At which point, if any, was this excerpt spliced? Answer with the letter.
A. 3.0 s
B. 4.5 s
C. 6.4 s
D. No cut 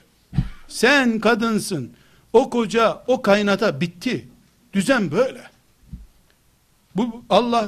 A